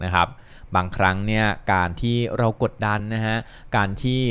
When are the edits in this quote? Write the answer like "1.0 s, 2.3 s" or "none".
none